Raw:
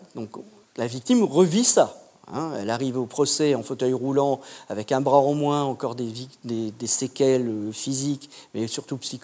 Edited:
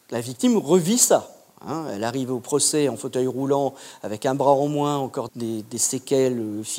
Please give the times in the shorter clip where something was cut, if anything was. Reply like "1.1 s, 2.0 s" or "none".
5.3 s